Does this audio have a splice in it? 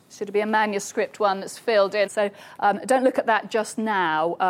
yes; 1 cut; at 2.1 s

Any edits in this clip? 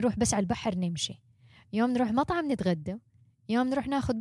no; 0 cuts

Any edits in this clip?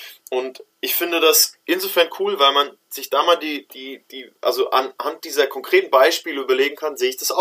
no; 0 cuts

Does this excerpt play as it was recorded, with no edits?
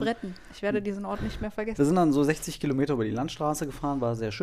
no; 1 cut; at 1.8 s

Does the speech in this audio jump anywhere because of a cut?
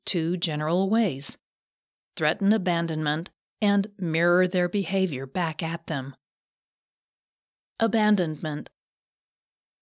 no; 0 cuts

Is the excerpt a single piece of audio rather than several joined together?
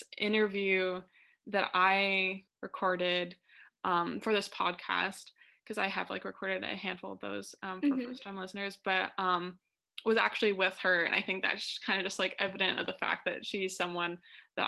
yes; 0 cuts

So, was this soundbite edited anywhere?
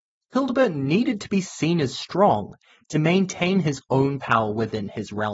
no; 0 cuts

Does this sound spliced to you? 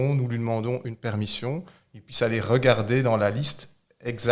no; 0 cuts

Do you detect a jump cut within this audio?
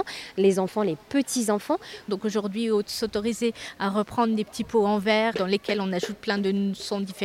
yes; 2 cuts; at 2.1 s, 5.3 s

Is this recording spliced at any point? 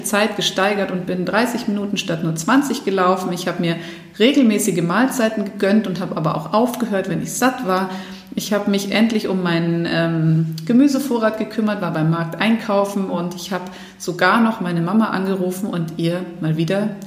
no; 0 cuts

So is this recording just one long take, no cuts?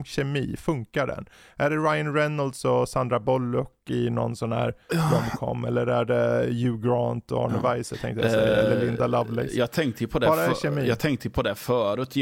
yes; 0 cuts

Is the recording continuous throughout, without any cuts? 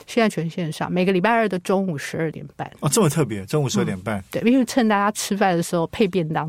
yes; 0 cuts

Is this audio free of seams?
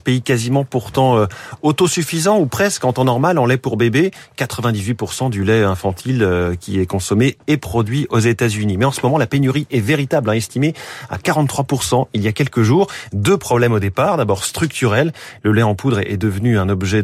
yes; 0 cuts

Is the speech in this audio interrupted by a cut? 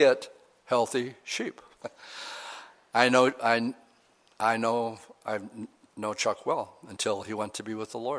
yes; 1 cut; at 1.8 s

